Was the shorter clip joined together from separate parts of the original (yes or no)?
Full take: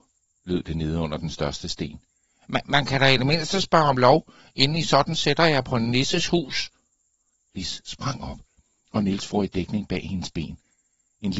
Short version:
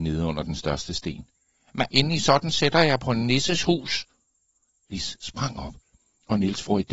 yes